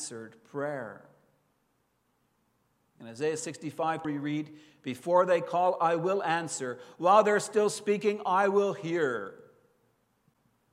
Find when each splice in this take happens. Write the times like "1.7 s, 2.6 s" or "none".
4.0 s